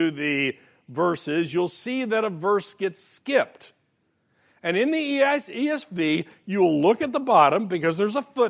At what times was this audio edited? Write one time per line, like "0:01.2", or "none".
none